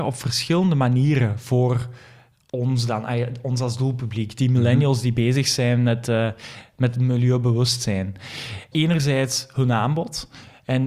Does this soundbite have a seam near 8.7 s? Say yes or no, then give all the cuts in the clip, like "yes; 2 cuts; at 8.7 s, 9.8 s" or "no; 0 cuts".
yes; 1 cut; at 8.7 s